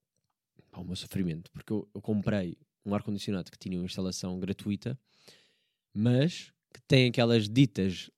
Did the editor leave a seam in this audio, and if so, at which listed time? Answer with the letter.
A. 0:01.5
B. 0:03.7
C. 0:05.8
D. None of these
D